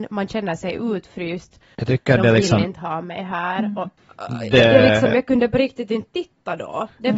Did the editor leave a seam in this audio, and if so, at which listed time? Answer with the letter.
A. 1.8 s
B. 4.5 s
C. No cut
A